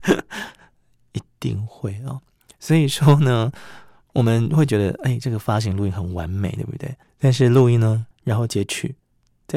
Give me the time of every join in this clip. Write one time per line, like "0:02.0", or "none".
0:07.0
0:08.1